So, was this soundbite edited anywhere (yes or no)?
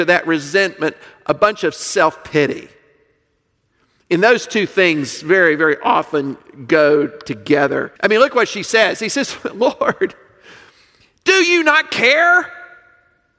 yes